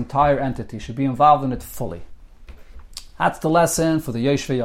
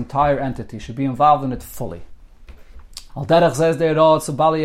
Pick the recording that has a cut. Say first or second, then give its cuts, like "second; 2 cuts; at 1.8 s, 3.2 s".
second; 1 cut; at 3.1 s